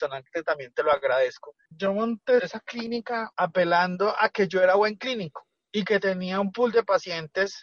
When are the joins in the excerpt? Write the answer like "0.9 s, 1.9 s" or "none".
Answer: 1.7 s

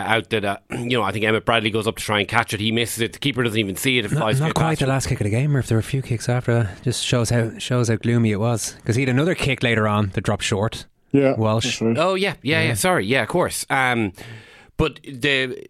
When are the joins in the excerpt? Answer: none

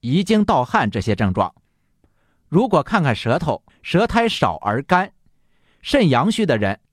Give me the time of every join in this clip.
3.7 s

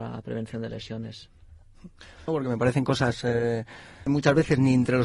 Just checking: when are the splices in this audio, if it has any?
2.3 s, 4.1 s

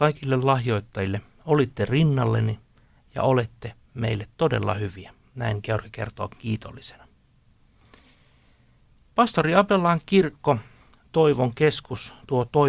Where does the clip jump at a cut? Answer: none

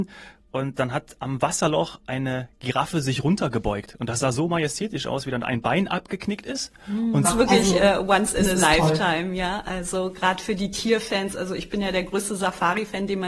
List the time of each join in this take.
7.2 s

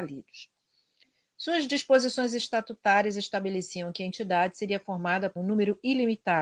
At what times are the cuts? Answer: 5.4 s

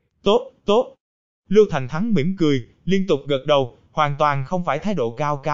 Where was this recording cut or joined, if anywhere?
none

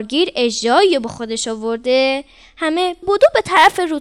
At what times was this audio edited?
3.0 s

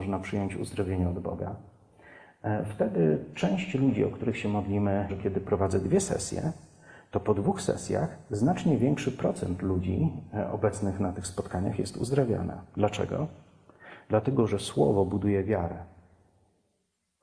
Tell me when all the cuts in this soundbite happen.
5.1 s

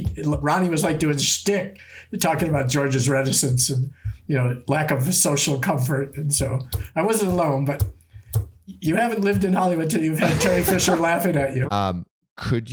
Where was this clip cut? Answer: 11.7 s

